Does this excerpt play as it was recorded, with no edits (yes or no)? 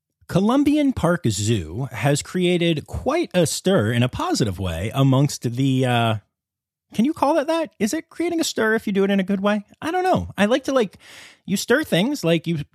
yes